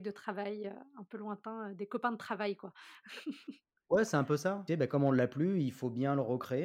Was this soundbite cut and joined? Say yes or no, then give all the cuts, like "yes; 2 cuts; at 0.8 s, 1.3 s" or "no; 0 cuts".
yes; 1 cut; at 4.7 s